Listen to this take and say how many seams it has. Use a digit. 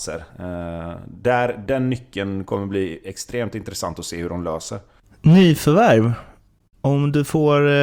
1